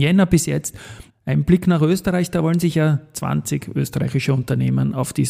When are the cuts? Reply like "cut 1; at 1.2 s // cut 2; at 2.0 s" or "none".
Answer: cut 1; at 1.1 s